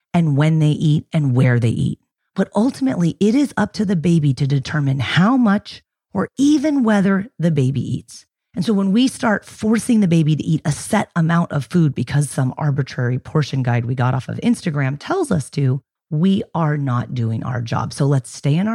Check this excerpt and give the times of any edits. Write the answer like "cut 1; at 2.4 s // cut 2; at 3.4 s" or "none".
none